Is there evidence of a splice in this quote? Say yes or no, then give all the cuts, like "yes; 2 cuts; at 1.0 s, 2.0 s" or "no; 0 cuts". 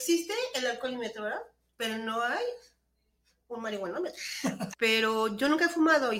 yes; 1 cut; at 4.7 s